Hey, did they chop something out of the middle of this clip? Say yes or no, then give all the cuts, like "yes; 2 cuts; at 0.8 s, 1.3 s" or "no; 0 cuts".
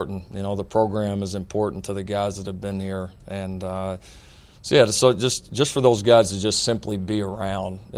no; 0 cuts